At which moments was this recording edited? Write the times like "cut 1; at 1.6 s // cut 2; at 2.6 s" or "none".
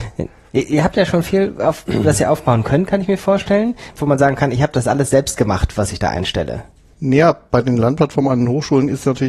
cut 1; at 3.9 s // cut 2; at 6.9 s